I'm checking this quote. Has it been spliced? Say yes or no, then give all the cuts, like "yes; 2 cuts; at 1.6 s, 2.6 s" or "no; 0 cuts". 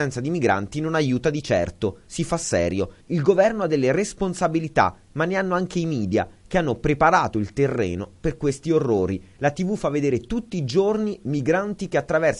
no; 0 cuts